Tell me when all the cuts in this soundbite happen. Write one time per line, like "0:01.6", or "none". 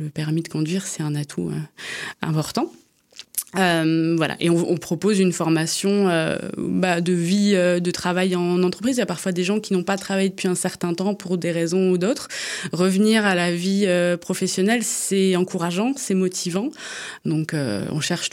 0:17.2